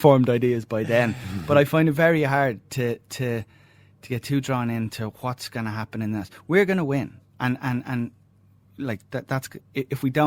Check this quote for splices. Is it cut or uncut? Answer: uncut